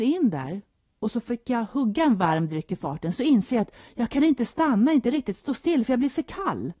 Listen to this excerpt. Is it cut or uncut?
uncut